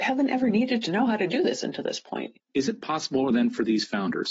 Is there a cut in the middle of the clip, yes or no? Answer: yes